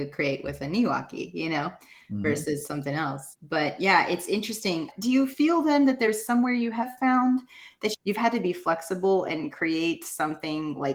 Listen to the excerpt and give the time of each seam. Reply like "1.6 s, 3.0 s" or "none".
none